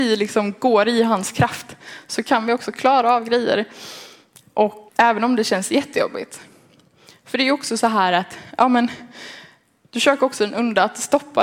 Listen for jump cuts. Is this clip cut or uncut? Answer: cut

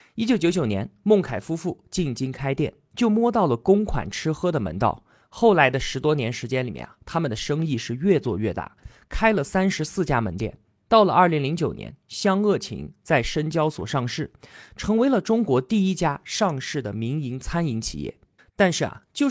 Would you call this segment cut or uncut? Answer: cut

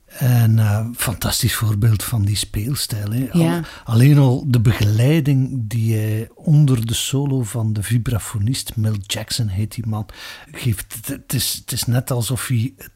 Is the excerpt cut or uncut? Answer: cut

